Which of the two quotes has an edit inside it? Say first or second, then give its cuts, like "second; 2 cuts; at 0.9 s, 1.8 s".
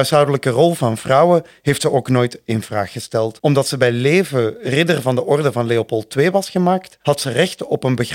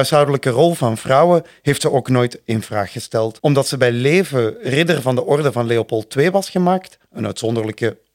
first; 1 cut; at 7.0 s